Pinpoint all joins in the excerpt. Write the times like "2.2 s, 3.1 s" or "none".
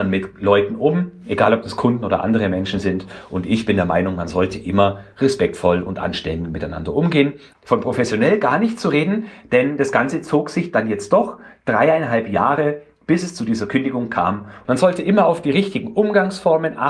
7.5 s, 14.7 s